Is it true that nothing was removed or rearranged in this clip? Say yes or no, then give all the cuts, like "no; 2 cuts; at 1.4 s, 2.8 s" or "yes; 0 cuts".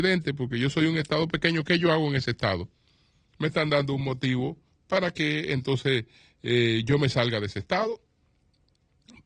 yes; 0 cuts